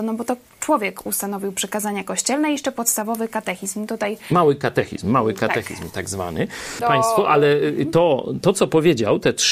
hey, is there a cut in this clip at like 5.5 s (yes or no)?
no